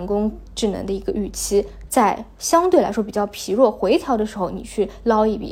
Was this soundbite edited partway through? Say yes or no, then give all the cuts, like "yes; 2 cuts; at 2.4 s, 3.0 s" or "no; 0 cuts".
yes; 1 cut; at 1.9 s